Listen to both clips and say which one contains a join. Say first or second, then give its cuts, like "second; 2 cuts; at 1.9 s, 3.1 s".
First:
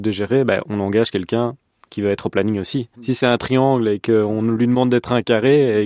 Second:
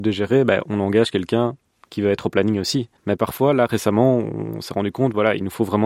first; 1 cut; at 2.9 s